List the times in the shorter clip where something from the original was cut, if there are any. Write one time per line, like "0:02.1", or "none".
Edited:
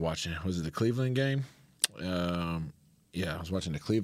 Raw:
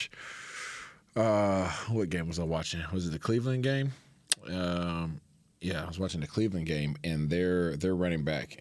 none